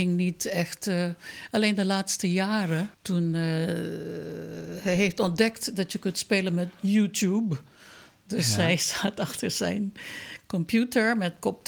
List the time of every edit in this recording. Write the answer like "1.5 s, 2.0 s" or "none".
2.9 s